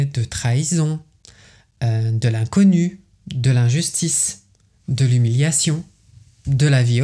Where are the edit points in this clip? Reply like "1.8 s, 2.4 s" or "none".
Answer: none